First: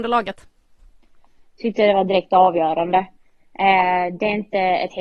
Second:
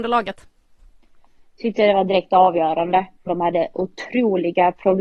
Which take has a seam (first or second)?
second